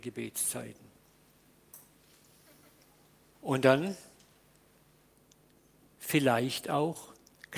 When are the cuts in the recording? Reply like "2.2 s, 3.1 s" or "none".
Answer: 3.3 s